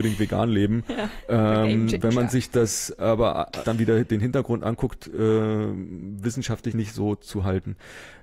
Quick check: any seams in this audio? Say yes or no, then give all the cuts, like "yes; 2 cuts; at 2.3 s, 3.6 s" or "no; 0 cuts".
yes; 2 cuts; at 3.6 s, 6.7 s